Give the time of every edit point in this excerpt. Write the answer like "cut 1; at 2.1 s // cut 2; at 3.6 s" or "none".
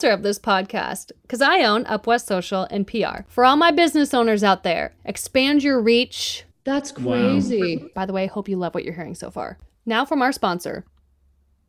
cut 1; at 5.0 s // cut 2; at 6.5 s // cut 3; at 7.9 s